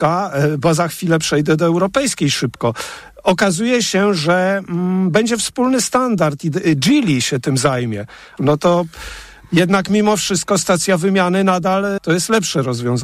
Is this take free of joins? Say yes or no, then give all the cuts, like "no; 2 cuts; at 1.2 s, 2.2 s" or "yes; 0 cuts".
no; 2 cuts; at 8.4 s, 12.0 s